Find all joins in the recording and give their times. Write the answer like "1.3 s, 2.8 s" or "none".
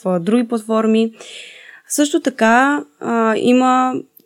none

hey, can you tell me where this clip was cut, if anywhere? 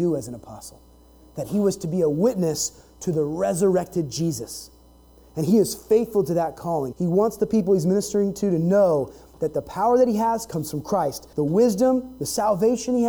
6.9 s, 11.3 s

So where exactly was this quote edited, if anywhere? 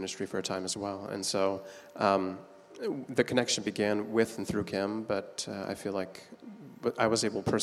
none

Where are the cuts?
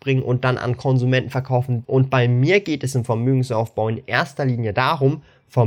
1.8 s

